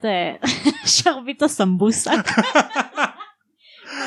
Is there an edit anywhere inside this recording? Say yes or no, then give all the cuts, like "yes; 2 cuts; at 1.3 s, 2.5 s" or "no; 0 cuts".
no; 0 cuts